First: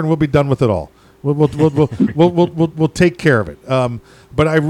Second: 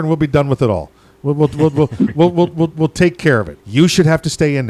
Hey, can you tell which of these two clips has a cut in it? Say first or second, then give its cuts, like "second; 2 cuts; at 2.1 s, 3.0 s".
second; 1 cut; at 3.6 s